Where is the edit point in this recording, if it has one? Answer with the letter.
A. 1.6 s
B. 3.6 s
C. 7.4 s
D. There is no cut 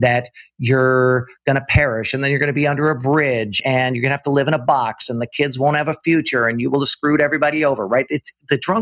B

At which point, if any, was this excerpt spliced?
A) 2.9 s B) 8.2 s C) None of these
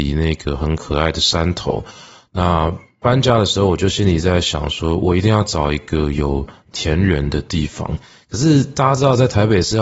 C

